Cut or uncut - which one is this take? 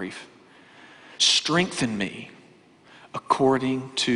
cut